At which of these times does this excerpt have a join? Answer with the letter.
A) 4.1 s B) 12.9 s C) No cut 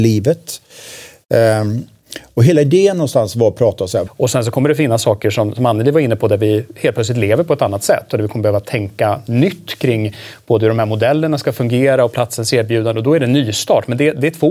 A